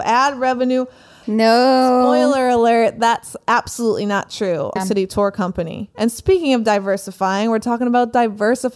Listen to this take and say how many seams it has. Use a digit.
2